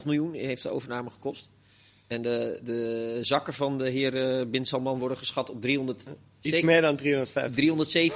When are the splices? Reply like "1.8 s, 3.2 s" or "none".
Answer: none